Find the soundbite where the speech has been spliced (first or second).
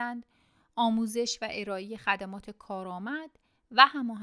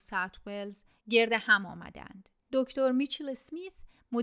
second